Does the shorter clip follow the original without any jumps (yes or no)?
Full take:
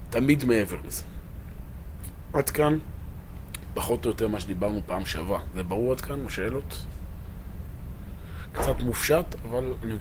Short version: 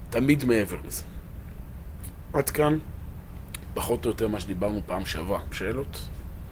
no